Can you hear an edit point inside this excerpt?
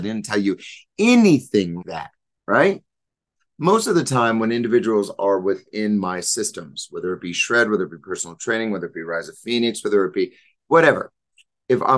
yes; 2 cuts; at 1.8 s, 3.4 s

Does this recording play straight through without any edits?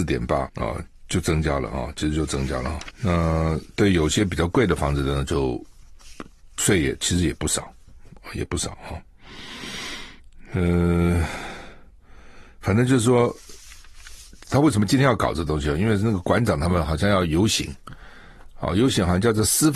yes; 0 cuts

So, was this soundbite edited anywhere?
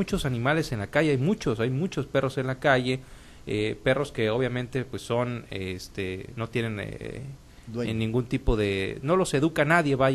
no; 0 cuts

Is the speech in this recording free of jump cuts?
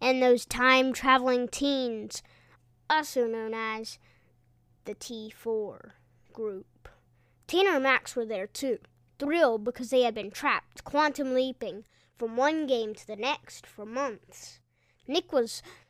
yes; 0 cuts

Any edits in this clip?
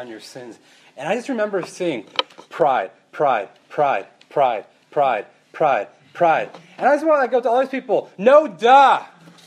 no; 0 cuts

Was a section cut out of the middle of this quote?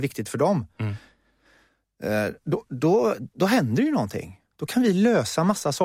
no; 0 cuts

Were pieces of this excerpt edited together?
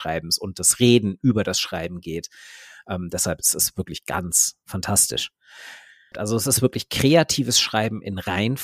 yes; 1 cut; at 6.1 s

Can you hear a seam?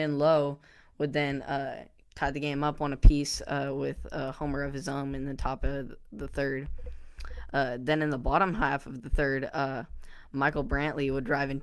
no; 0 cuts

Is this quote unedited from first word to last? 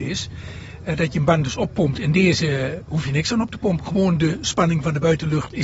yes; 0 cuts

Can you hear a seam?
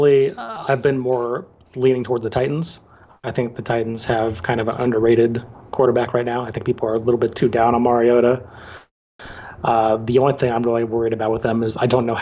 no; 0 cuts

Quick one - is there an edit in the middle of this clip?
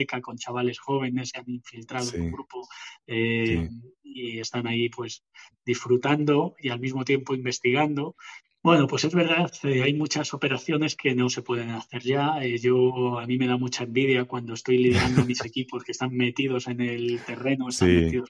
yes; 1 cut; at 8.5 s

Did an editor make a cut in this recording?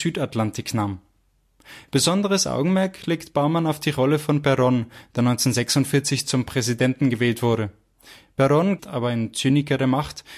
yes; 1 cut; at 8.8 s

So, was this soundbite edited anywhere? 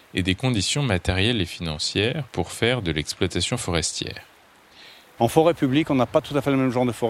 yes; 1 cut; at 5.2 s

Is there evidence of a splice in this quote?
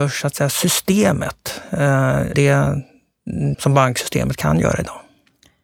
yes; 2 cuts; at 2.3 s, 3.5 s

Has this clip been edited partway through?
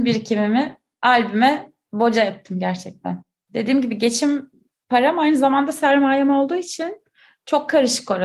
no; 0 cuts

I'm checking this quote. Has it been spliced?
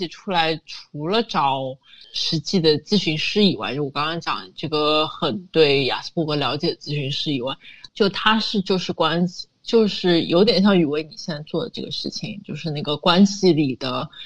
yes; 2 cuts; at 2.0 s, 7.9 s

